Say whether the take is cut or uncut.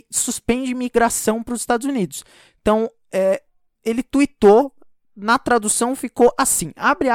uncut